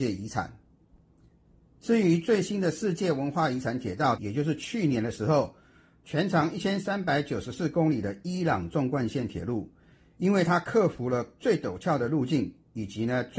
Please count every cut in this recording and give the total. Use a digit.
1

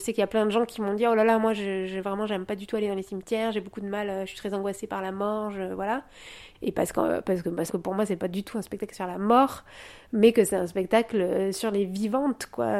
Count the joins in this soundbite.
2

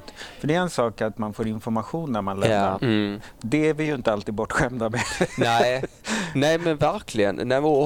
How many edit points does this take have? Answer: 1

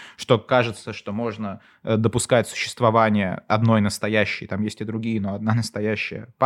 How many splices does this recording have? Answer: 0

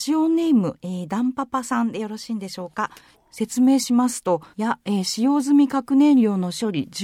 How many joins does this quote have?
2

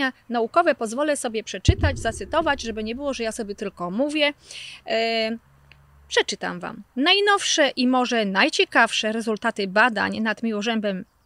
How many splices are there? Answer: 0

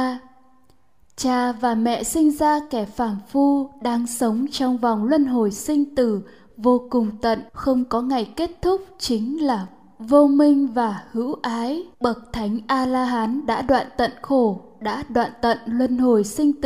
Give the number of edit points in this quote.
2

